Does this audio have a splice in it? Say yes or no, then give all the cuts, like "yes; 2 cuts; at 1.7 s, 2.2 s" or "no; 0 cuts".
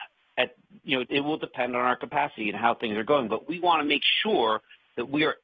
yes; 1 cut; at 1.0 s